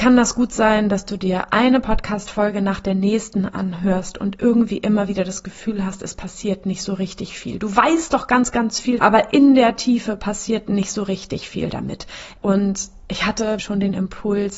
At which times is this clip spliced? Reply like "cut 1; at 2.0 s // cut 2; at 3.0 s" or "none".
cut 1; at 9.0 s // cut 2; at 12.4 s // cut 3; at 13.6 s